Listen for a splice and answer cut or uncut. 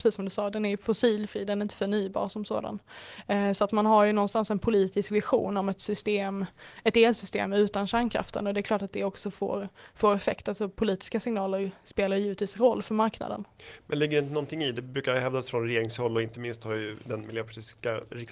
uncut